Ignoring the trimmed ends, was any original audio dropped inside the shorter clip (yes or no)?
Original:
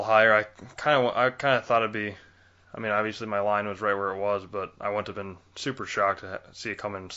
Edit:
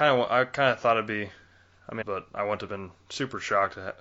yes